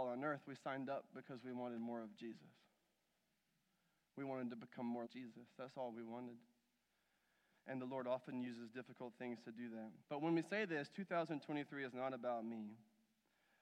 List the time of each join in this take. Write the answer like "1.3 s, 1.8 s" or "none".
5.1 s, 10.0 s